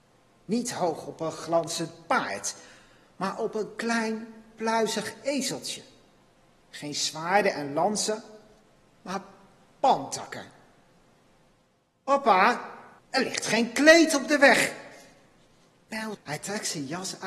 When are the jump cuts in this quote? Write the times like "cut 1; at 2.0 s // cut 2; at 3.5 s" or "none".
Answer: cut 1; at 13.0 s // cut 2; at 16.1 s

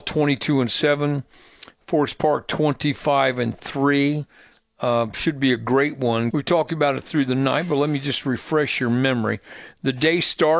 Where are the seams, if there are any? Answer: cut 1; at 6.3 s

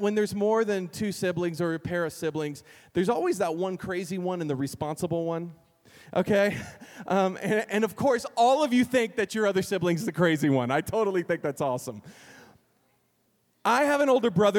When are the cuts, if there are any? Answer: none

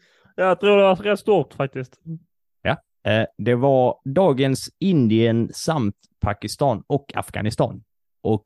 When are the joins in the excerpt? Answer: none

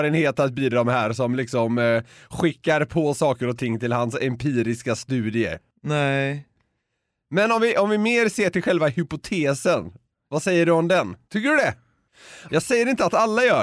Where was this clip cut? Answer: cut 1; at 11.3 s // cut 2; at 12.5 s

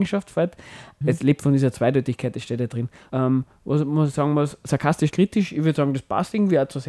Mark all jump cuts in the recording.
cut 1; at 1.0 s // cut 2; at 3.1 s // cut 3; at 5.1 s

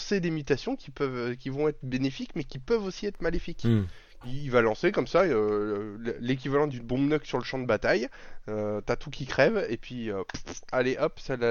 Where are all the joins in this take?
cut 1; at 4.2 s

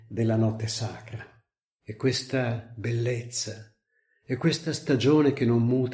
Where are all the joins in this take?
cut 1; at 1.6 s

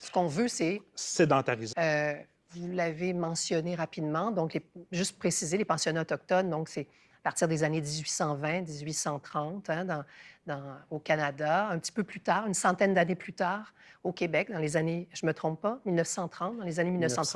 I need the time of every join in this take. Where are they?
cut 1; at 1.7 s

